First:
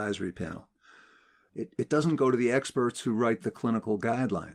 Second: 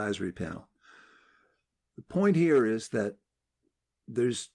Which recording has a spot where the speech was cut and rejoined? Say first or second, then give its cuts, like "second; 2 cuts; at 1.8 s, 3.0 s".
first; 1 cut; at 1.5 s